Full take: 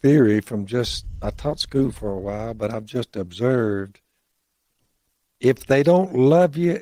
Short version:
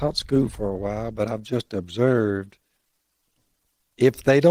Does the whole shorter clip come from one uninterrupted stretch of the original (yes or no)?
yes